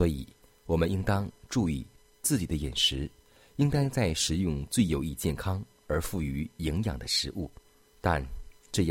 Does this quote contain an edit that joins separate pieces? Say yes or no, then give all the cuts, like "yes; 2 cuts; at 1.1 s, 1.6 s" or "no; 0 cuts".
yes; 1 cut; at 7.9 s